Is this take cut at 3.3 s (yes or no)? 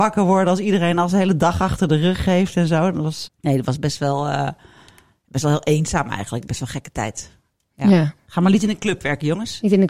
yes